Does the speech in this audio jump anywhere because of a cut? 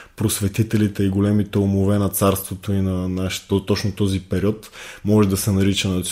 yes; 1 cut; at 3.5 s

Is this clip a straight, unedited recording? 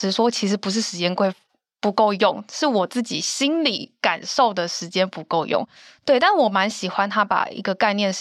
yes; 0 cuts

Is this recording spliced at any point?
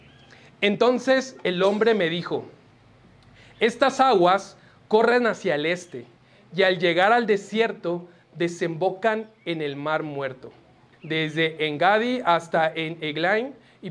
yes; 1 cut; at 10.9 s

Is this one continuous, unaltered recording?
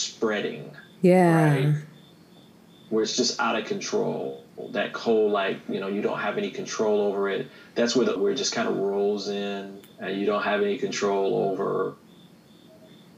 no; 2 cuts; at 8.2 s, 9.9 s

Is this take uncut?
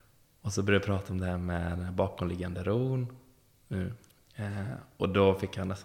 yes; 0 cuts

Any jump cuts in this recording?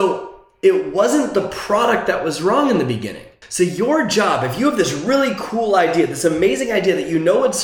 yes; 1 cut; at 3.4 s

